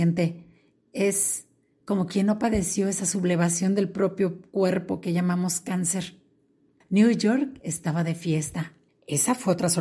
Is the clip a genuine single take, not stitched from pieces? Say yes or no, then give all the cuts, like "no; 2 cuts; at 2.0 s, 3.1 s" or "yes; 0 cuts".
no; 2 cuts; at 6.8 s, 8.9 s